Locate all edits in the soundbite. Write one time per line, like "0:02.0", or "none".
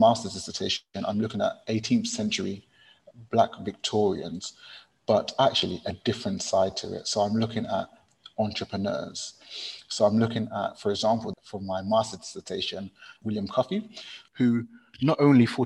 0:11.3